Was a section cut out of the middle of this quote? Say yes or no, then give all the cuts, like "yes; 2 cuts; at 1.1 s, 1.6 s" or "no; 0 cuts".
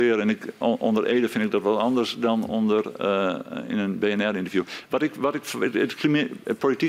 no; 0 cuts